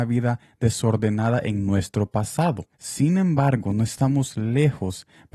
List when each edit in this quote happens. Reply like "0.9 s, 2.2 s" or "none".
2.7 s